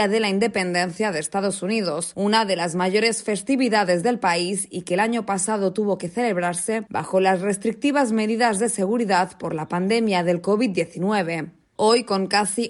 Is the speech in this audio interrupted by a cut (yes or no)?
no